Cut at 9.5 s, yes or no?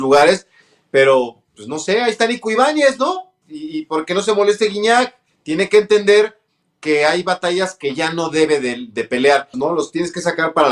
yes